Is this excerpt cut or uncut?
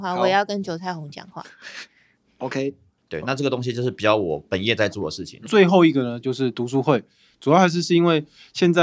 cut